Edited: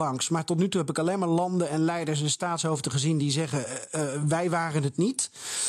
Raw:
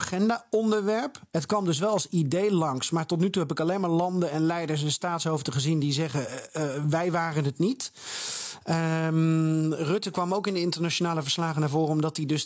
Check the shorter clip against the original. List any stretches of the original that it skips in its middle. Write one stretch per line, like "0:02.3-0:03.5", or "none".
none